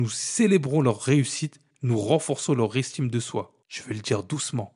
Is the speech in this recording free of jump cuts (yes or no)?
no